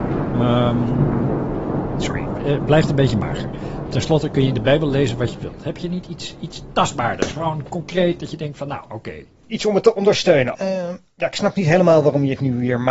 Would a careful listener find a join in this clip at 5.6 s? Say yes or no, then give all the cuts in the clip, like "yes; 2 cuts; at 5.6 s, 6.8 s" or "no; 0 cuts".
no; 1 cut; at 10.5 s